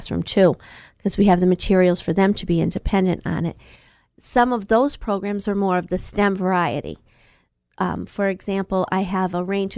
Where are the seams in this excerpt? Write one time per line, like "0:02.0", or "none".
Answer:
none